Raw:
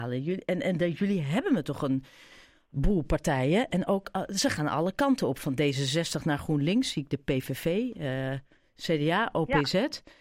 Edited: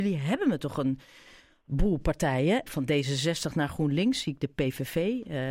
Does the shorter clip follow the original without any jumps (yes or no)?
no